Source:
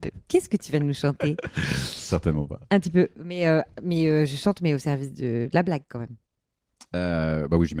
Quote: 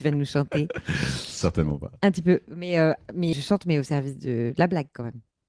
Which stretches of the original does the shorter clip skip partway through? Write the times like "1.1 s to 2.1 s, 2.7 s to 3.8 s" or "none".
4.0 s to 4.3 s